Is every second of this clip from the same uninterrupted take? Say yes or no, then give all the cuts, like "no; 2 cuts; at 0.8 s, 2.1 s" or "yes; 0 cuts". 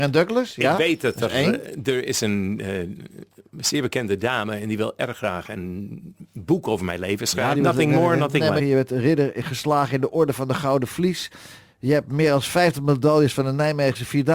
no; 2 cuts; at 7.5 s, 8.6 s